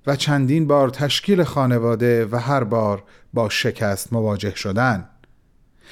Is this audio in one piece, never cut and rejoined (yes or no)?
yes